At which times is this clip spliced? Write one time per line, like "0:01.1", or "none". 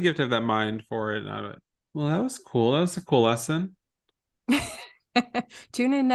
0:01.7